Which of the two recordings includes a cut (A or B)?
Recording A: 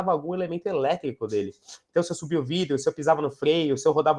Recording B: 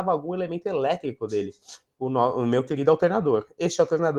B